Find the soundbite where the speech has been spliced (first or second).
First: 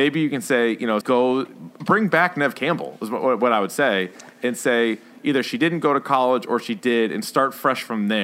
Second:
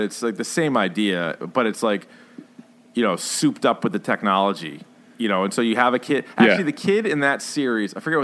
first